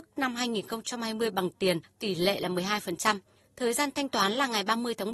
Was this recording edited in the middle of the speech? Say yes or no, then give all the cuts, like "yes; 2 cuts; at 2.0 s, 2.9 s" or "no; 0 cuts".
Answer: no; 0 cuts